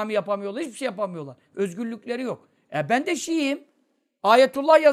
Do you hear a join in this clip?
no; 0 cuts

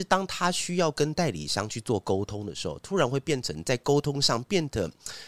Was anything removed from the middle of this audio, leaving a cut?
no; 0 cuts

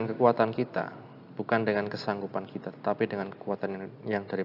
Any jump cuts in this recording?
no; 0 cuts

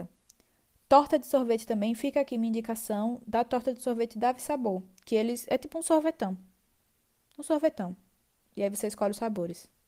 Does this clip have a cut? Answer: no; 0 cuts

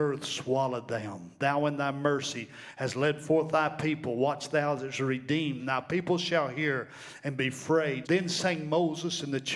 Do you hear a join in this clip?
yes; 2 cuts; at 5.6 s, 8.0 s

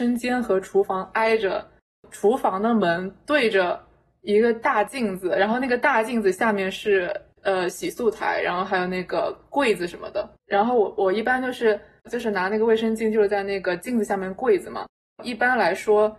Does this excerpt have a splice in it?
yes; 1 cut; at 10.4 s

